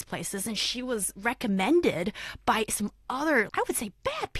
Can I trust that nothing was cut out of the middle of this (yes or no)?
no